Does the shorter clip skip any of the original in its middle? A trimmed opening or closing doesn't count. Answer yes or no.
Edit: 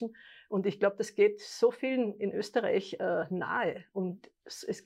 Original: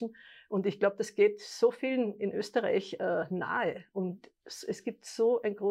no